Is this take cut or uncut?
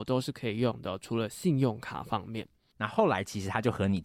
cut